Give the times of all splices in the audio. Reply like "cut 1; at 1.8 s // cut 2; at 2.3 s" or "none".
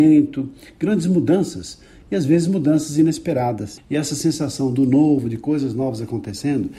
cut 1; at 3.8 s